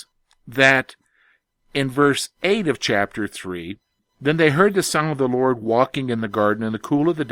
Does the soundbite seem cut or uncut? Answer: uncut